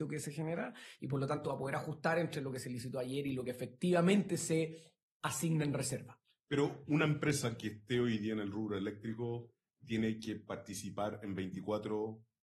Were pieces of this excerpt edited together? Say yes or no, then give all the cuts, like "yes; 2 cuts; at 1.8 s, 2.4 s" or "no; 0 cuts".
no; 0 cuts